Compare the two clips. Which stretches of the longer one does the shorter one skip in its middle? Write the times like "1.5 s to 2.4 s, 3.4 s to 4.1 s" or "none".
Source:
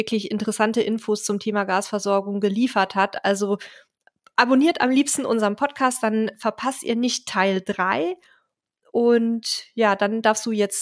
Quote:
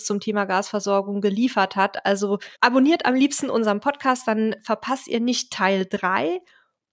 3.7 s to 4.3 s